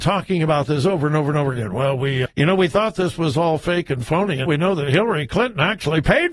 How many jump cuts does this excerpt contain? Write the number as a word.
two